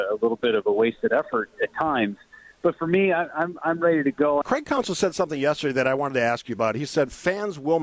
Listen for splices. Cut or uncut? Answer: cut